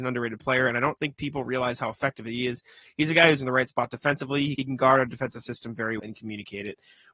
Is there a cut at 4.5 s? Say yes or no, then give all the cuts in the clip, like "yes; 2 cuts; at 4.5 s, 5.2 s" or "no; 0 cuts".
yes; 3 cuts; at 3.4 s, 4.5 s, 6.0 s